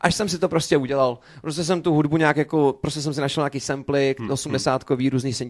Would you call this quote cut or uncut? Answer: uncut